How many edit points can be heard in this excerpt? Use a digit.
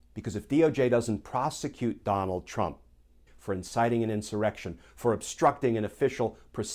2